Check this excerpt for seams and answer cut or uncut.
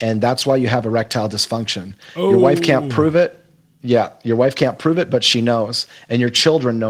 uncut